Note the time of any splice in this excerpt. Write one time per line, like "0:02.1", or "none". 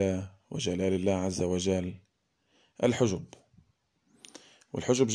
none